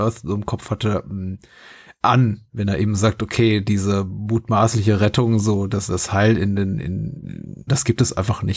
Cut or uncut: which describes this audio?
cut